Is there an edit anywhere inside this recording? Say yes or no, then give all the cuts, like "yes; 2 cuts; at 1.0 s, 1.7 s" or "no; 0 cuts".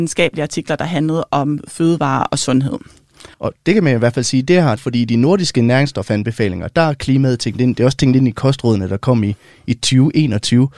yes; 2 cuts; at 3.3 s, 4.8 s